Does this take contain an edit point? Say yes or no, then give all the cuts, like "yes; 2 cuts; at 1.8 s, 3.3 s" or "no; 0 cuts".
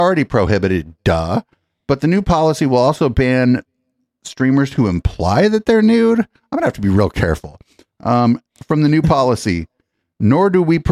no; 0 cuts